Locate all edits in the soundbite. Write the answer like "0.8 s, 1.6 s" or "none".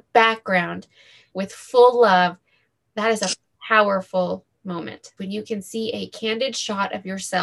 1.3 s, 5.2 s